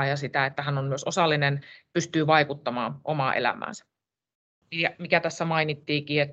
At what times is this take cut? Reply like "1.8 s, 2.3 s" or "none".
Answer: 4.6 s

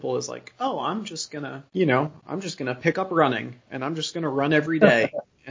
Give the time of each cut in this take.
1.7 s

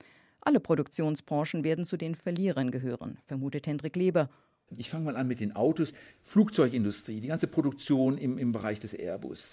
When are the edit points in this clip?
4.6 s, 6.1 s

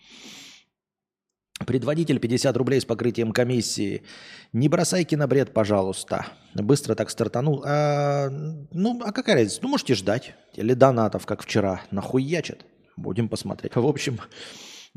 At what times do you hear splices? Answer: 10.5 s, 13.7 s

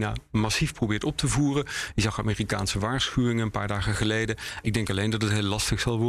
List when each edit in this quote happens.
4.6 s

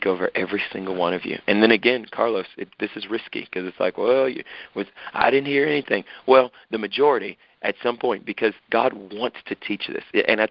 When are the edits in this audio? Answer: 8.6 s

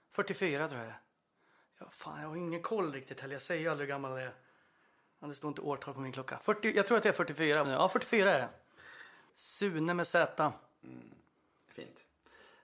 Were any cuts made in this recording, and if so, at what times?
7.6 s, 9.3 s

